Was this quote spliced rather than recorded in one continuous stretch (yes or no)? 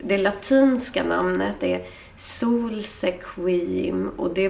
yes